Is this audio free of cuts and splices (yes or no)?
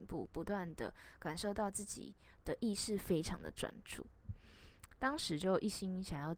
no